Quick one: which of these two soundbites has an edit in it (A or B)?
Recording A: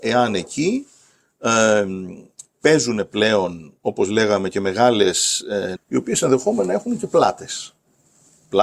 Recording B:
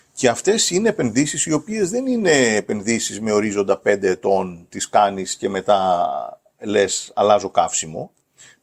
A